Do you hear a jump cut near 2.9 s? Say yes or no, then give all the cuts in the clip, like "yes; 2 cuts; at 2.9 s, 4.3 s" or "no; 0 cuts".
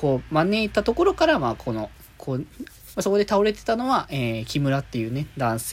yes; 1 cut; at 2.9 s